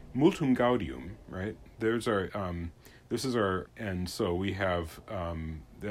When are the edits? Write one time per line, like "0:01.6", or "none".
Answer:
0:02.3
0:03.7